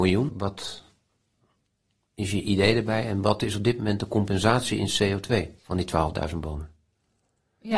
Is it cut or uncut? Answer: cut